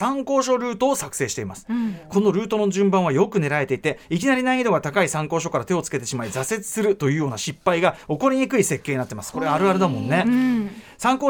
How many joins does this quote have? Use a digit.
0